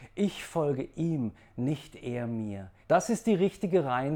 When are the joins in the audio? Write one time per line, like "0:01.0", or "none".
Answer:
0:02.8